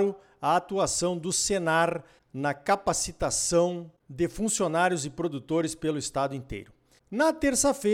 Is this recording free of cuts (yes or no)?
yes